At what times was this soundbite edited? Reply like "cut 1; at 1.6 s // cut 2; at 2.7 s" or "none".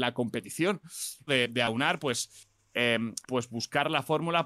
cut 1; at 1.3 s // cut 2; at 3.2 s